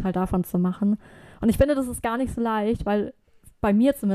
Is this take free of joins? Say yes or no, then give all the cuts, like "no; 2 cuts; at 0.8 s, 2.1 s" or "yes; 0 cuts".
yes; 0 cuts